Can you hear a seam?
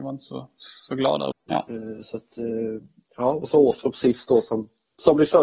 yes; 1 cut; at 1.3 s

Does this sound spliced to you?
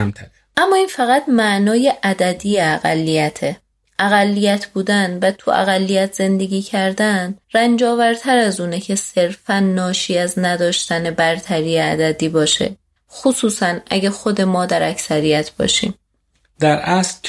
yes; 2 cuts; at 7.4 s, 13.0 s

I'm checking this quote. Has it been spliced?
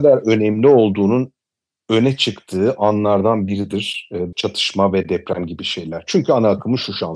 yes; 1 cut; at 4.3 s

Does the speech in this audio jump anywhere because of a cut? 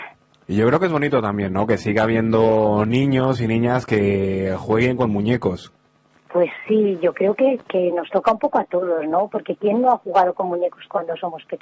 no; 0 cuts

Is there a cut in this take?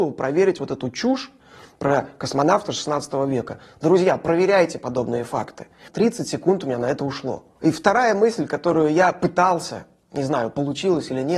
yes; 1 cut; at 5.9 s

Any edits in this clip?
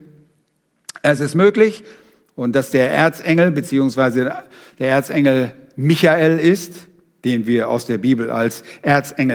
no; 0 cuts

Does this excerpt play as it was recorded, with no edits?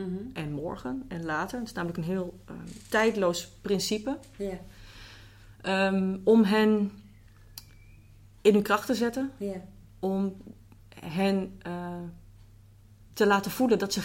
yes; 0 cuts

